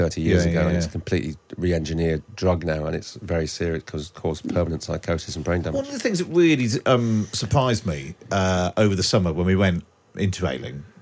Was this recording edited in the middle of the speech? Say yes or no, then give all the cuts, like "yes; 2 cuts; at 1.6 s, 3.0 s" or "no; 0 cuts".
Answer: no; 0 cuts